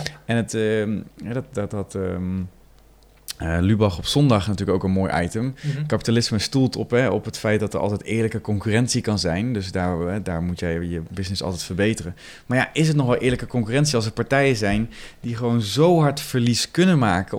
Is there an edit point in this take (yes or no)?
no